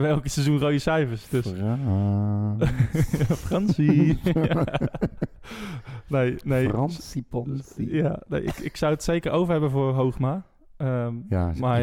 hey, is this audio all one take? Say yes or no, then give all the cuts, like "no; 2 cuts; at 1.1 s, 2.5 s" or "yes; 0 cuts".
yes; 0 cuts